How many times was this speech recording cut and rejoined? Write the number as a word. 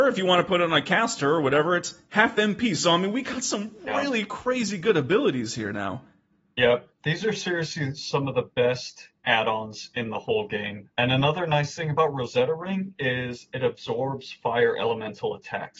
zero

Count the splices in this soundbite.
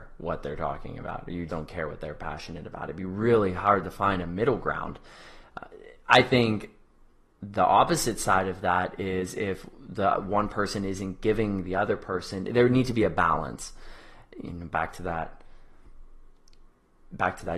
one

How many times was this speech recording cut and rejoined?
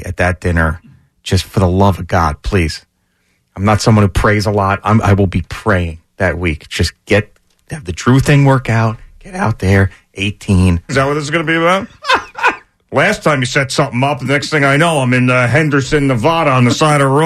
one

